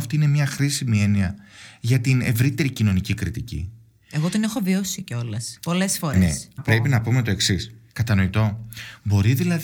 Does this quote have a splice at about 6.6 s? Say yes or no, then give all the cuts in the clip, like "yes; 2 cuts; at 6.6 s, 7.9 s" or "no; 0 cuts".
yes; 2 cuts; at 6.6 s, 7.9 s